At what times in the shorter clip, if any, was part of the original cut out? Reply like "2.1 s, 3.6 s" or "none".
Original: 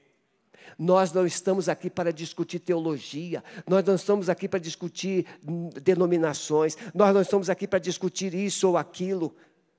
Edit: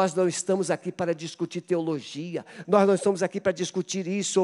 2.6 s